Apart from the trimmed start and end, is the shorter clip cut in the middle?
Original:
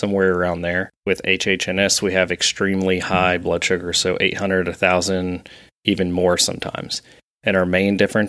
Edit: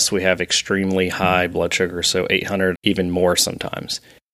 yes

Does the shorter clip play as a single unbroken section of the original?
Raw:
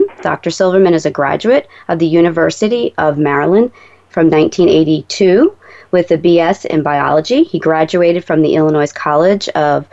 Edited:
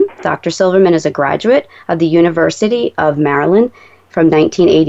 yes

